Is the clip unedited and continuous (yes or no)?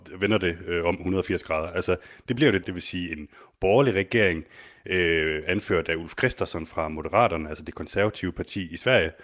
no